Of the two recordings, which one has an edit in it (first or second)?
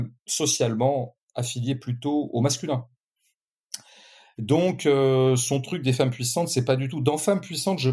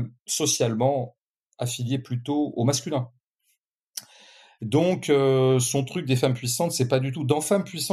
first